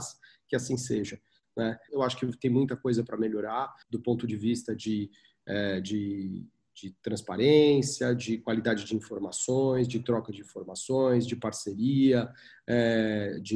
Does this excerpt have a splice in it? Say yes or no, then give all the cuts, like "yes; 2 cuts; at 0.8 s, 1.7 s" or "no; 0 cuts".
yes; 2 cuts; at 1.9 s, 3.8 s